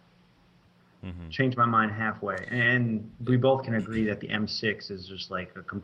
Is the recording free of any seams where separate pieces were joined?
no; 1 cut; at 0.9 s

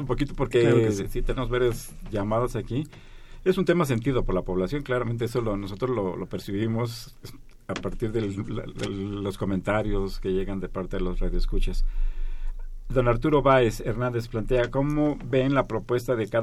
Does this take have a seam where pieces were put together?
no; 0 cuts

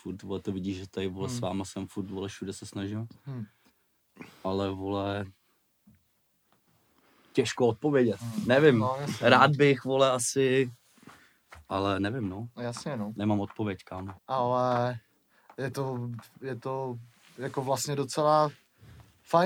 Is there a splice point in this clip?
yes; 1 cut; at 14.1 s

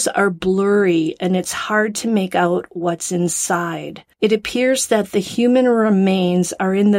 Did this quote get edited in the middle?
yes; 1 cut; at 4.1 s

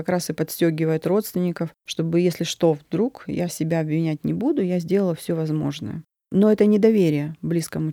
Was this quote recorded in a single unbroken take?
yes; 0 cuts

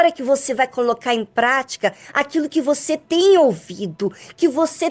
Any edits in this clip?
no; 0 cuts

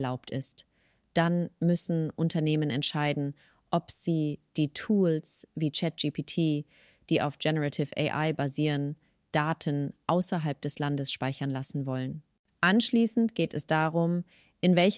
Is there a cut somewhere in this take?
no; 0 cuts

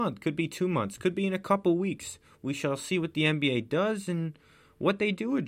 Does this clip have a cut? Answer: no; 0 cuts

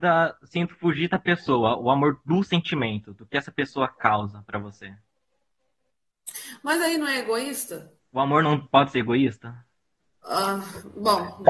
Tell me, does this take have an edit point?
yes; 1 cut; at 8.0 s

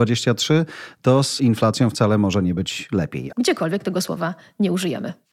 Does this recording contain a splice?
yes; 1 cut; at 3.3 s

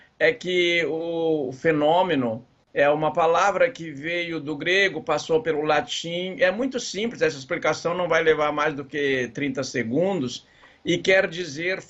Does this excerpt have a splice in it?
no; 0 cuts

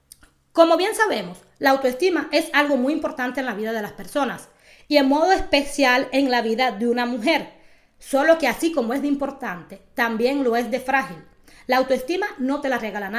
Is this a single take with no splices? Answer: yes; 0 cuts

